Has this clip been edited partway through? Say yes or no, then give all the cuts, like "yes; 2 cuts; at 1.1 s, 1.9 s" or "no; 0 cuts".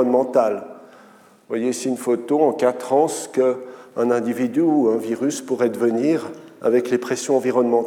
no; 0 cuts